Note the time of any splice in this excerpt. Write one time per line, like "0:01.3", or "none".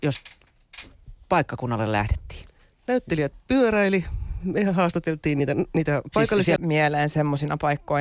0:06.6